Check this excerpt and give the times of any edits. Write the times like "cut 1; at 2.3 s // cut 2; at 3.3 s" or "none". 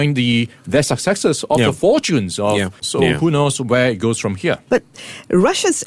cut 1; at 2.8 s // cut 2; at 4.7 s